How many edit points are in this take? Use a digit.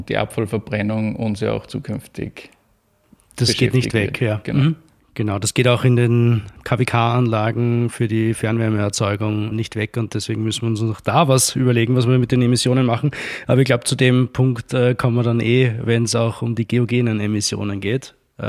1